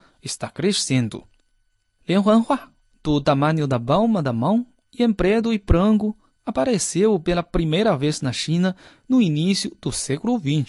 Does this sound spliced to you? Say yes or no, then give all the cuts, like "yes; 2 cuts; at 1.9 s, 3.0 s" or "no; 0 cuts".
no; 0 cuts